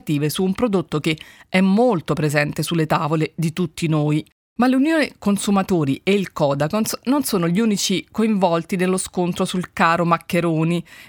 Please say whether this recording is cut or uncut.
uncut